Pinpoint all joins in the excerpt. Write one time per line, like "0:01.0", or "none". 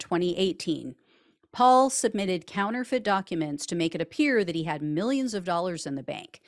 none